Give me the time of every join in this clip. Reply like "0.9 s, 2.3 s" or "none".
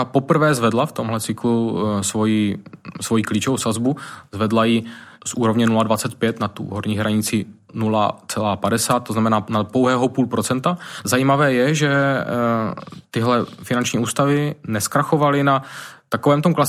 11.0 s